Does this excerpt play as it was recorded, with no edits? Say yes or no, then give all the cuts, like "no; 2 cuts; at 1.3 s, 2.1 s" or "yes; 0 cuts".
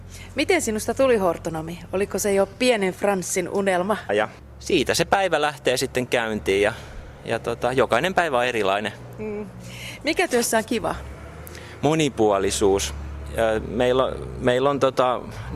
no; 1 cut; at 4.1 s